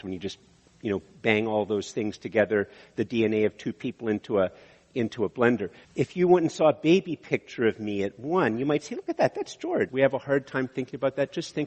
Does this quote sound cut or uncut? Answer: cut